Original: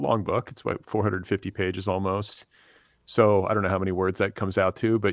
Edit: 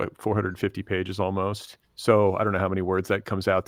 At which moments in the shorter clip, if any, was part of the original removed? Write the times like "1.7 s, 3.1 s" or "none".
1.8 s